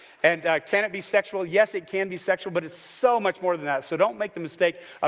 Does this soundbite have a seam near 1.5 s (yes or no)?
no